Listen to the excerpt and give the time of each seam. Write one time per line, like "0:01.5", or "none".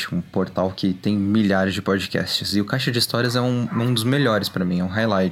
none